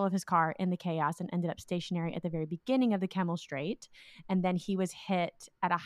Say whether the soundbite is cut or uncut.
uncut